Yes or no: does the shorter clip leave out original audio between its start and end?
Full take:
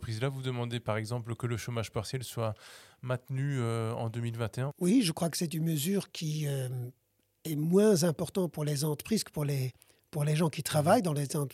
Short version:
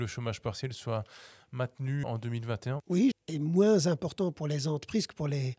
yes